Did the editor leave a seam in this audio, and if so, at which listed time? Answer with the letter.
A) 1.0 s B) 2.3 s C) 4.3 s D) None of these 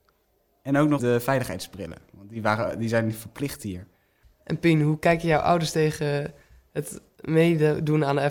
A